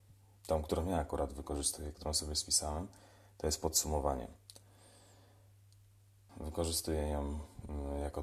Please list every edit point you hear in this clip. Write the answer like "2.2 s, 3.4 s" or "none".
6.3 s